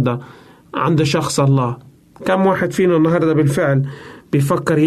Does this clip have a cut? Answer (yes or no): no